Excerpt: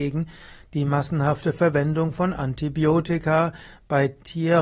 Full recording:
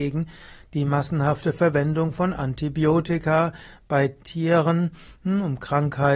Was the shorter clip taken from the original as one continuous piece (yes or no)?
yes